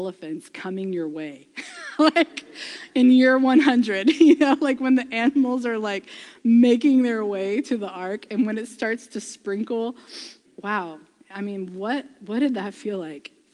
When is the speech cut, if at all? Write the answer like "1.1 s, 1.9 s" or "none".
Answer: 10.4 s